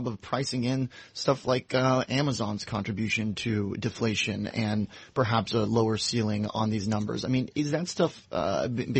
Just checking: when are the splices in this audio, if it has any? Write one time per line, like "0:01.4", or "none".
none